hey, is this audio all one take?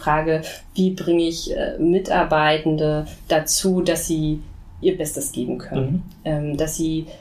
yes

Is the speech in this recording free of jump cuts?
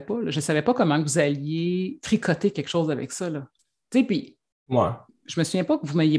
yes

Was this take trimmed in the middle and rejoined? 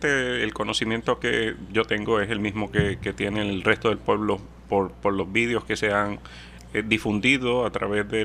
no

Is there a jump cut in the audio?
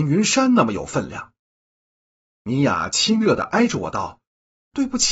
no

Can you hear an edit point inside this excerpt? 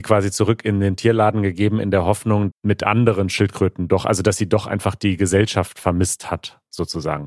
yes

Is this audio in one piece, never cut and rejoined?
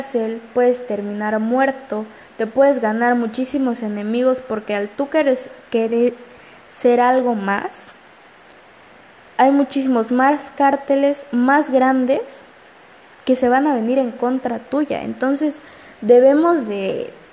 yes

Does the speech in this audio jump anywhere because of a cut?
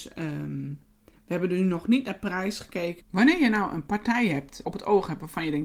yes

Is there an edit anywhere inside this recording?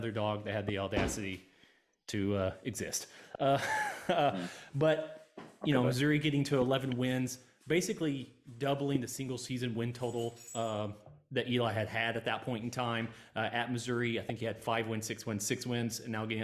no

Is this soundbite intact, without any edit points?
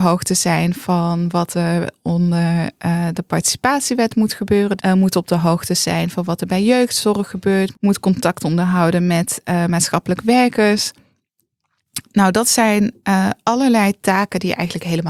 no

